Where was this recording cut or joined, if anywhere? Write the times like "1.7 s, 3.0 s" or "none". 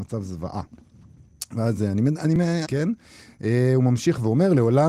2.6 s